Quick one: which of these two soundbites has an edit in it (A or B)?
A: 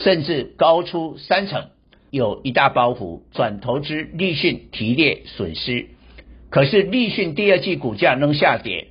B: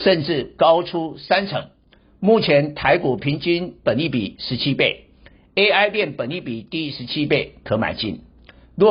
A